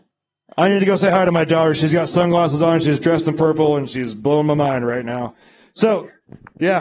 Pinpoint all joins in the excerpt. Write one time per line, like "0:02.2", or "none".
none